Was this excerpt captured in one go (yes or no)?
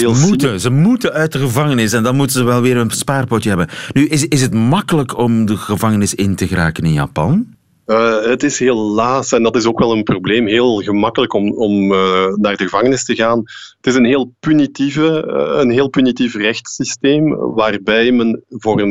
yes